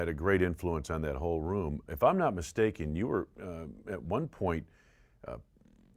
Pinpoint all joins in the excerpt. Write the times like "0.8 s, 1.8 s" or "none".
1.9 s